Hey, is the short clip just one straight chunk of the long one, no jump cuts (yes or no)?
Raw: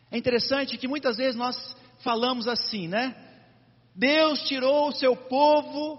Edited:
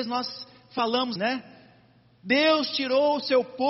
no